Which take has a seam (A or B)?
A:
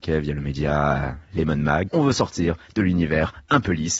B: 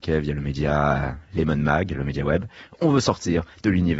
A